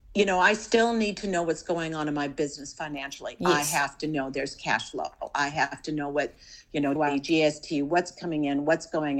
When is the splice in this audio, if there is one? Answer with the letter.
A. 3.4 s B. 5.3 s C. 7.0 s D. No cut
C